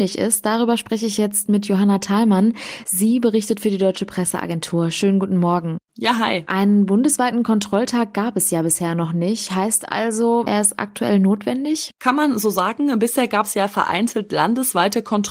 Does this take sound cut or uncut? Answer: uncut